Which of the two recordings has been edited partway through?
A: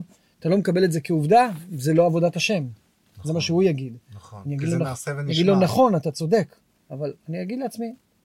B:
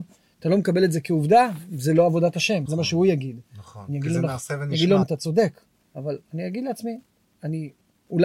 B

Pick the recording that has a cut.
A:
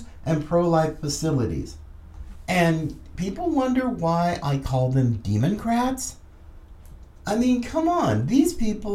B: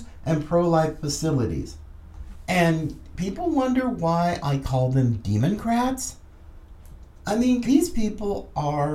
B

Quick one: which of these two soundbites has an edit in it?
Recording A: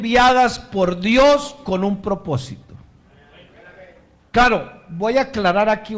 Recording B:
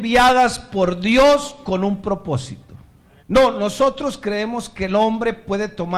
B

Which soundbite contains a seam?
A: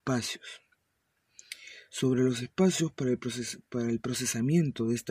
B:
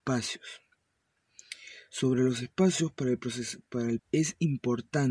B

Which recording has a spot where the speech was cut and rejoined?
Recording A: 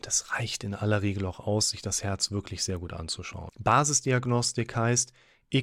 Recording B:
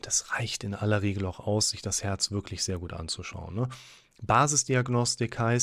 A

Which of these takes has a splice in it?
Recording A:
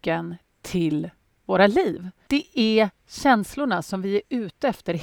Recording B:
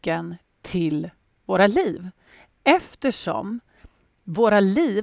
A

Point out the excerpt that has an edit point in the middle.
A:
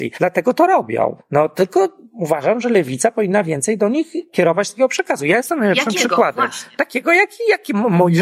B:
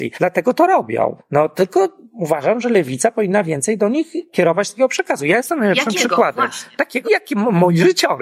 B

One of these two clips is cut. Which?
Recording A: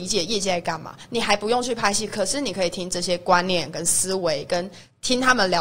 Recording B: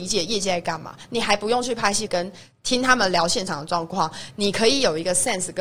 B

